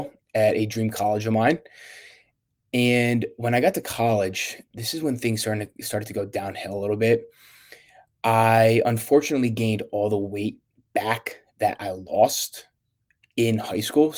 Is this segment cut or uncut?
uncut